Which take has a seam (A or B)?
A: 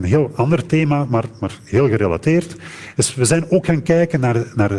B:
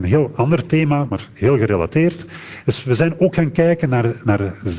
B